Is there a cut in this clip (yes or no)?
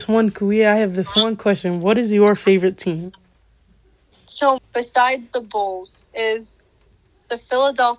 yes